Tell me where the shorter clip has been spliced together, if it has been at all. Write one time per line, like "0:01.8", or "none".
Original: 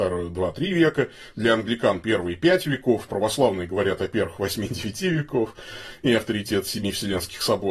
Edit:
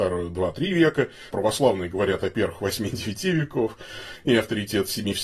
0:01.3